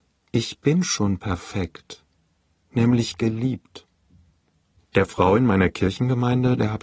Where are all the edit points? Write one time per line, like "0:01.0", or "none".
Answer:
0:04.7